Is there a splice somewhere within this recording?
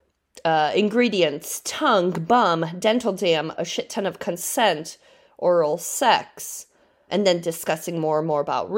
yes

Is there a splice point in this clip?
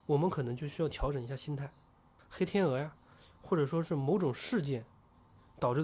yes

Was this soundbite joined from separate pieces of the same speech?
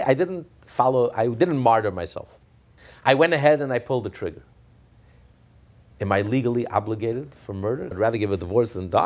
yes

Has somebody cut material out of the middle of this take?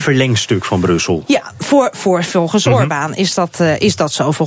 no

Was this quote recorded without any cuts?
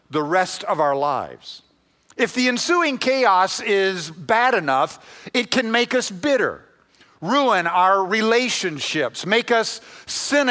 yes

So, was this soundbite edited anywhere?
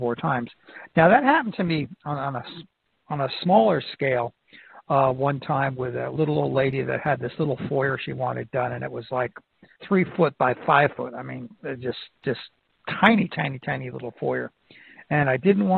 yes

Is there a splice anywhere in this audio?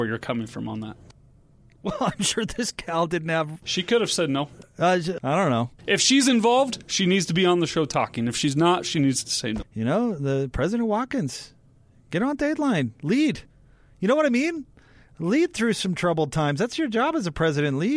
yes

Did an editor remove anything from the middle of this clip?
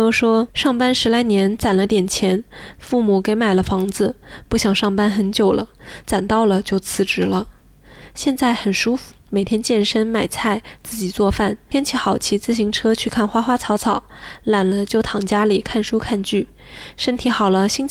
yes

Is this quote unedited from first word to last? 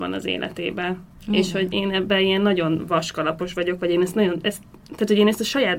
yes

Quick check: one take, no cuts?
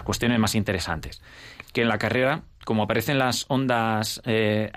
no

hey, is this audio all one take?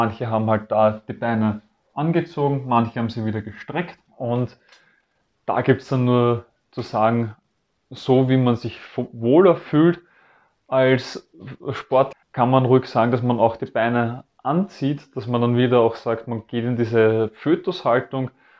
no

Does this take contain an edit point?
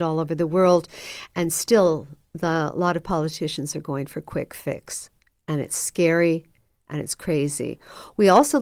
no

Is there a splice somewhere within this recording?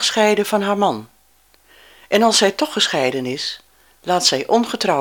no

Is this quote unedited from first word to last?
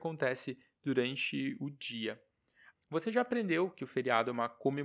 no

